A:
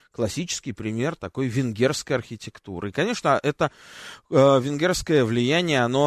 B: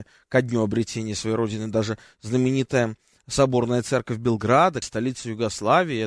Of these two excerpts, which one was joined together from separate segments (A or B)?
B